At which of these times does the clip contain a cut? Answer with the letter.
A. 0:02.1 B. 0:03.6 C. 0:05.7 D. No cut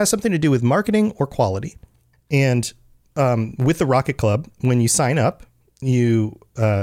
A